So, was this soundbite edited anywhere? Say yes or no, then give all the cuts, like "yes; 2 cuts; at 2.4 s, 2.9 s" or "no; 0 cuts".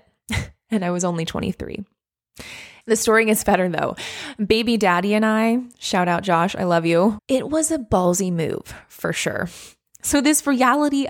yes; 1 cut; at 7.2 s